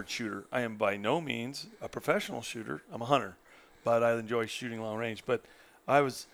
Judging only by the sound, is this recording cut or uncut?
uncut